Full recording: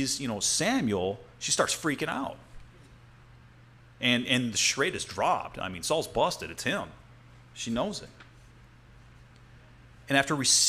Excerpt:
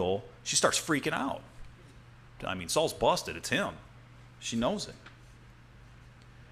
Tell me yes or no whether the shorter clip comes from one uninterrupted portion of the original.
no